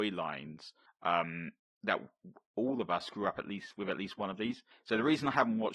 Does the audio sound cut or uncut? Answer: uncut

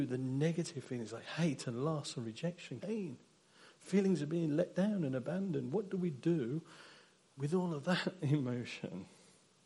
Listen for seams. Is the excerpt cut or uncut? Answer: cut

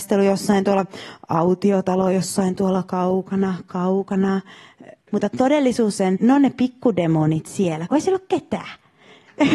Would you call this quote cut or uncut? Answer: cut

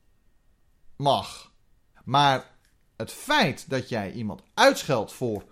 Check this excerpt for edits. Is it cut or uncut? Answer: cut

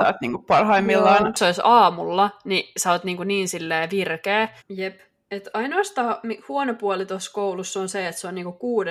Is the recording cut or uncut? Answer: cut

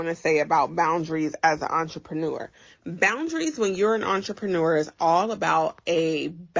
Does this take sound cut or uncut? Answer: uncut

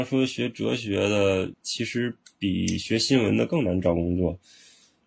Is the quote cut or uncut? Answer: cut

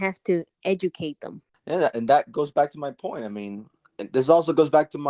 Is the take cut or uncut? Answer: uncut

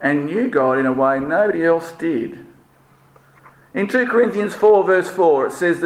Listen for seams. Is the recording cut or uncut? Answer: uncut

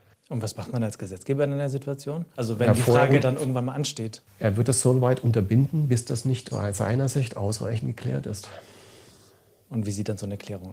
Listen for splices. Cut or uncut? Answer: cut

